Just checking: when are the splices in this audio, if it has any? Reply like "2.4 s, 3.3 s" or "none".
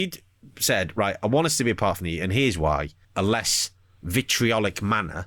3.0 s